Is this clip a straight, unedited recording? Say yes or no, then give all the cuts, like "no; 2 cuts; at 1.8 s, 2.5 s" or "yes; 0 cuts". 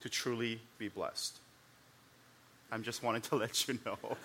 no; 1 cut; at 2.7 s